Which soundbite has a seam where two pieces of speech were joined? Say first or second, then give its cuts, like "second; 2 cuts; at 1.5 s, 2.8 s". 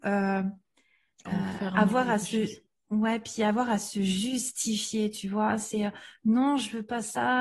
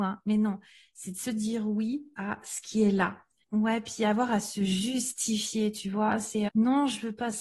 second; 2 cuts; at 3.4 s, 6.5 s